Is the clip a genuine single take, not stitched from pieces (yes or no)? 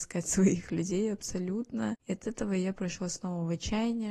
yes